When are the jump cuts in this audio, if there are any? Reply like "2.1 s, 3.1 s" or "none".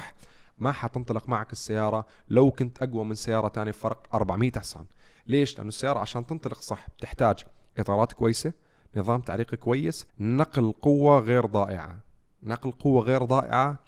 10.1 s